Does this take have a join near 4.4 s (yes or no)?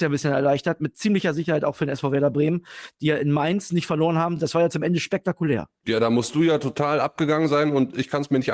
no